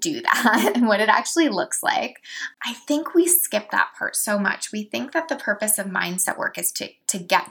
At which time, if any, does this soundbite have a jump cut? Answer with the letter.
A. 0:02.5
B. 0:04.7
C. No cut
A